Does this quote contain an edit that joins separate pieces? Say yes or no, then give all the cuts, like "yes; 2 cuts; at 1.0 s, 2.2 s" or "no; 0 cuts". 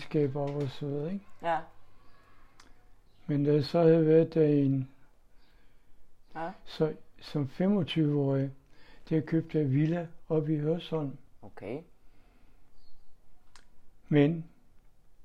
yes; 1 cut; at 6.3 s